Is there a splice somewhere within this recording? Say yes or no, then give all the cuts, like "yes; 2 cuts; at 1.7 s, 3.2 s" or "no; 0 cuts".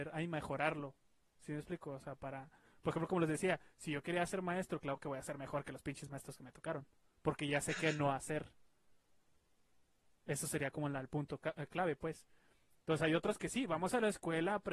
no; 0 cuts